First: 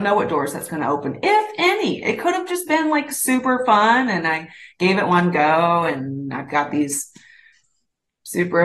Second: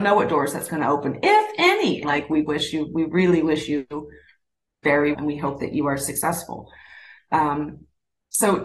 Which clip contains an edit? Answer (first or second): second